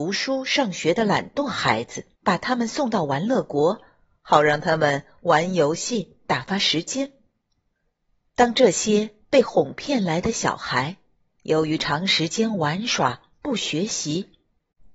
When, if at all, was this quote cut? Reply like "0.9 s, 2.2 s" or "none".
2.1 s